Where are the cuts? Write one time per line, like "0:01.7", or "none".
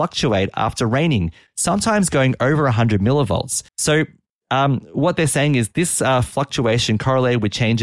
0:03.7